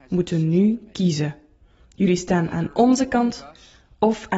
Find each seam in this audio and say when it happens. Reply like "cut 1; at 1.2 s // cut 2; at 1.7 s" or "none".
none